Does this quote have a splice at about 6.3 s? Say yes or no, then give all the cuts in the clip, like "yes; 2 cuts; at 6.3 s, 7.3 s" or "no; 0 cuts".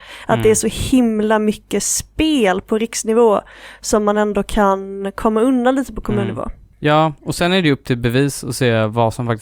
no; 0 cuts